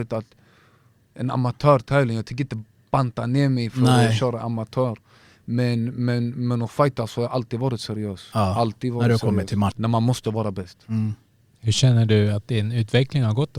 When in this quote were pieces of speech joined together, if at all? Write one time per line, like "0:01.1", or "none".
0:09.7